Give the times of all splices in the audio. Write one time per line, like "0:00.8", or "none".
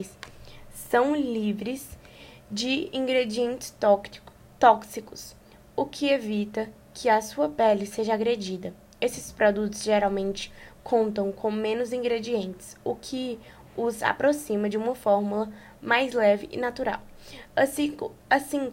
none